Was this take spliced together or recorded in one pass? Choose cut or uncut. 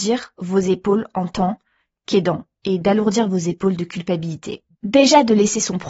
cut